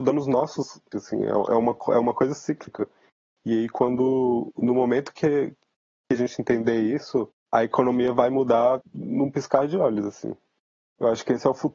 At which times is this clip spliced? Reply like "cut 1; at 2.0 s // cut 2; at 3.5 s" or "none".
cut 1; at 0.9 s